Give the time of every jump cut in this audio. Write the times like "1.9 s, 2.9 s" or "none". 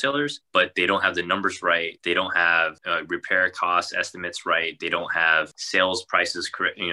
none